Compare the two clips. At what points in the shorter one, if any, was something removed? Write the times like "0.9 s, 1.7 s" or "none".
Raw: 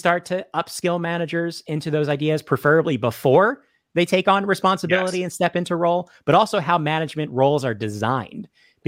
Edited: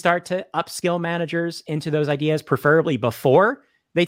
none